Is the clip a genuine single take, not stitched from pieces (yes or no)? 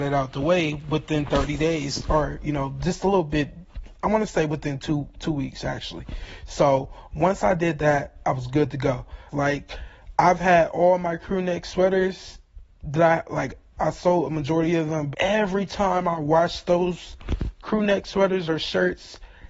no